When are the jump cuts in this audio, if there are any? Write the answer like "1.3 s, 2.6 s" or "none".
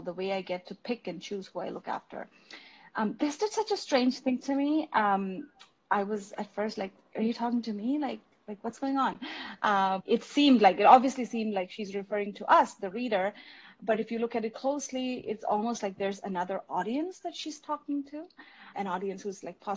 10.0 s, 18.7 s